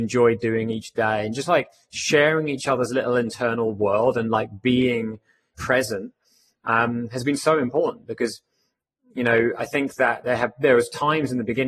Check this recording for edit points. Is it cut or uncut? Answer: cut